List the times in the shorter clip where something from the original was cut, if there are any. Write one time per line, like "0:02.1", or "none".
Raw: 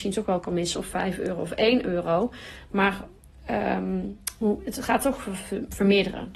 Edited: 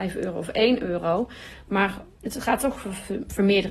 0:02.2